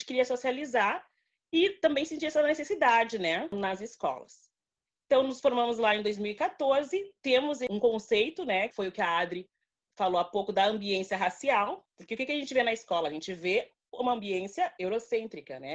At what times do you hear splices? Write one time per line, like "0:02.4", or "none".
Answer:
0:08.7